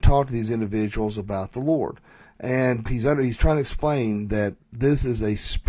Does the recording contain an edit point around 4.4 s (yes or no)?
no